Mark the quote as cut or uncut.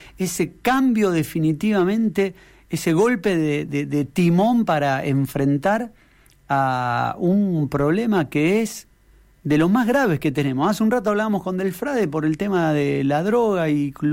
uncut